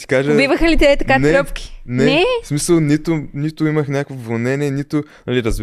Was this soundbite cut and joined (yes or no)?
no